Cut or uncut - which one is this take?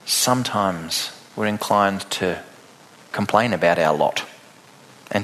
uncut